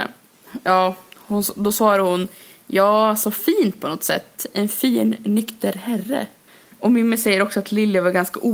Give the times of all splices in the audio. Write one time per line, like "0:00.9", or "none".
none